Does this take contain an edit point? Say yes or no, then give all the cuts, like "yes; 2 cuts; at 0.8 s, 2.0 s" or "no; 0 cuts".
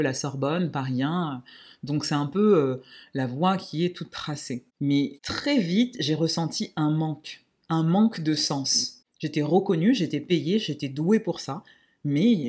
no; 0 cuts